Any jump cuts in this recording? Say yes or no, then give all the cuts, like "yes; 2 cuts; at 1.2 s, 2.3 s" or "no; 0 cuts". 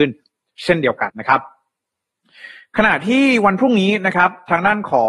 yes; 1 cut; at 1.1 s